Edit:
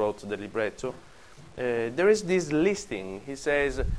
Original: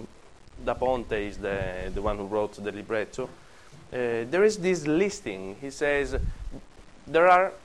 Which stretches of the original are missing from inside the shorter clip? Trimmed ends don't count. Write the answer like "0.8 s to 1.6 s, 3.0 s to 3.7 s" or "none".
none